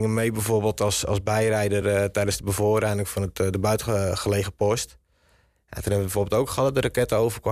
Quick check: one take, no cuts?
yes; 0 cuts

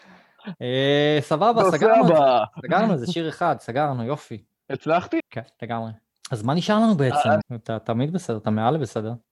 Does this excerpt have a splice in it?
yes; 2 cuts; at 5.2 s, 7.4 s

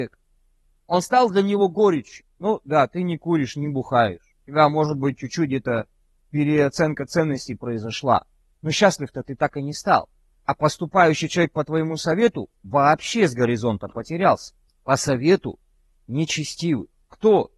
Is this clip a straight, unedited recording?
no; 1 cut; at 14.7 s

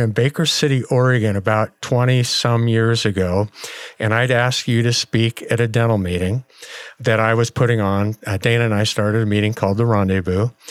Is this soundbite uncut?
yes; 0 cuts

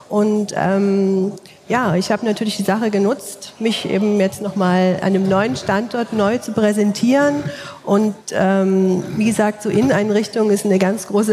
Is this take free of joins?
yes; 0 cuts

